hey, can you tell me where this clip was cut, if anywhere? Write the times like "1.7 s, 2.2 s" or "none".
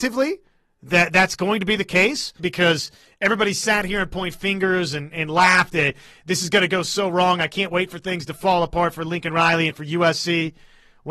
2.4 s